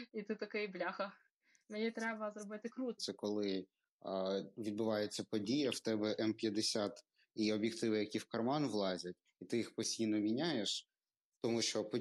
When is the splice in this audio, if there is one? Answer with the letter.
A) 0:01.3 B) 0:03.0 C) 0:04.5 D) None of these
B